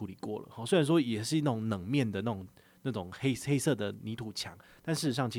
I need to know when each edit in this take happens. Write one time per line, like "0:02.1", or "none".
none